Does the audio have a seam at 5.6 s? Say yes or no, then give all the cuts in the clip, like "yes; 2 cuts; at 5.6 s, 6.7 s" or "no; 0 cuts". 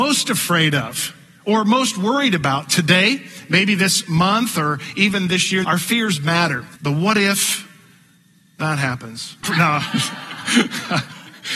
yes; 3 cuts; at 5.6 s, 6.8 s, 9.4 s